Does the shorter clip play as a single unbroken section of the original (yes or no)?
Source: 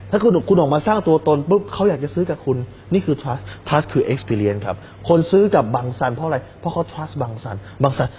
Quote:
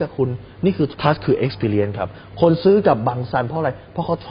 no